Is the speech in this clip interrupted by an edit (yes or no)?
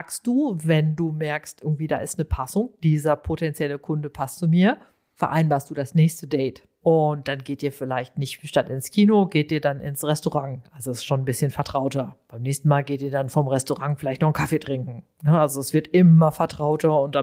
no